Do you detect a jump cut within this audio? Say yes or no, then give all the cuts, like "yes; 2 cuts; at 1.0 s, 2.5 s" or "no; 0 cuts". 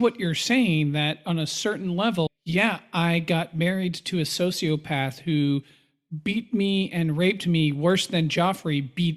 yes; 1 cut; at 2.3 s